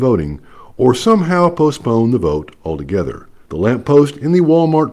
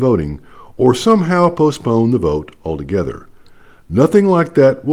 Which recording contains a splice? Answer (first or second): first